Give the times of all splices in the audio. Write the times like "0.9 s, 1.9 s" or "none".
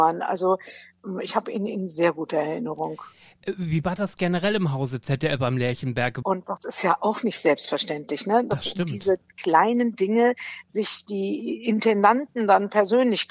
6.2 s